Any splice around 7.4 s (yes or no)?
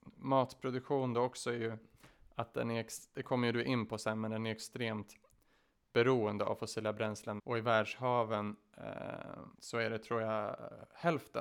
yes